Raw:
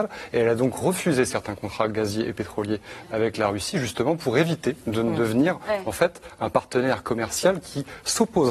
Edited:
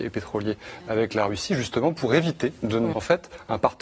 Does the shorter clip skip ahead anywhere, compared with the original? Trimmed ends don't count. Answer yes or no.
yes